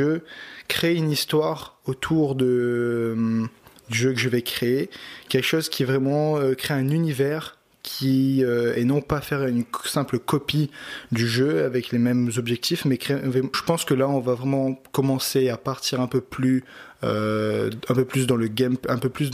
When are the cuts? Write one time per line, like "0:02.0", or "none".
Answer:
0:13.5